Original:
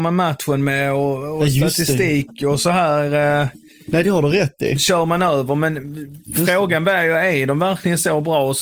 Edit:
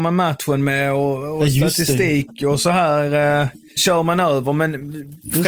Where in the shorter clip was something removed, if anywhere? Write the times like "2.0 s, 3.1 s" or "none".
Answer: 3.8 s